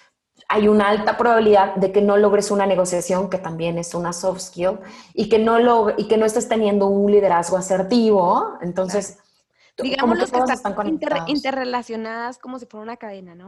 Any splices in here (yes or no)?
no